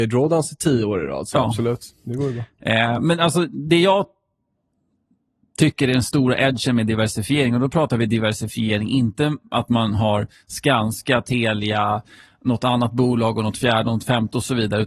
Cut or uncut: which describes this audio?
uncut